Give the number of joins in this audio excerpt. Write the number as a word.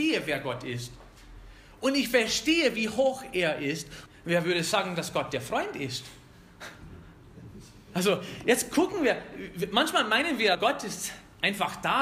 two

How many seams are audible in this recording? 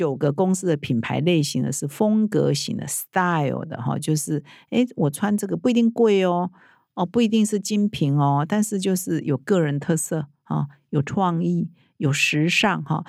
zero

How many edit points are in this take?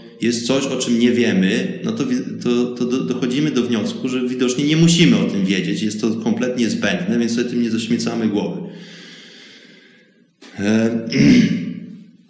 zero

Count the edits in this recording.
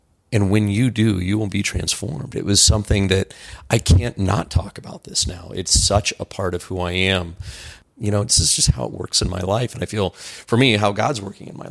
zero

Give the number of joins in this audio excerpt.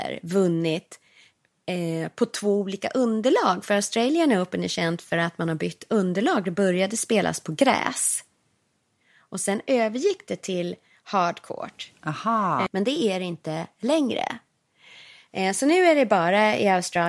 one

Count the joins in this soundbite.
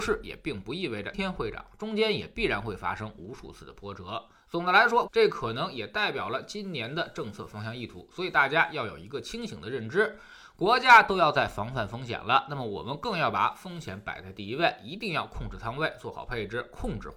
two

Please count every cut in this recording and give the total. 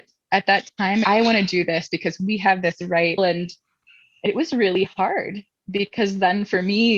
two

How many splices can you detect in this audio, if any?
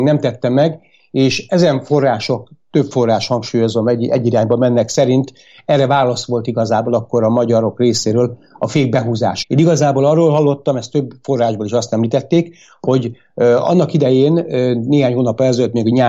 one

